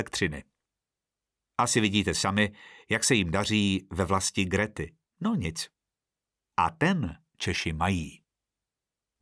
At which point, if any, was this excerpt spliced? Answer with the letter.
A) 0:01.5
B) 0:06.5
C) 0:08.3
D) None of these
B